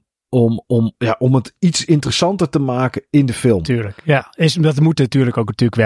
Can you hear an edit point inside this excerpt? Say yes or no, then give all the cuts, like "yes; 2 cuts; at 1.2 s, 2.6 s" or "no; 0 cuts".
no; 0 cuts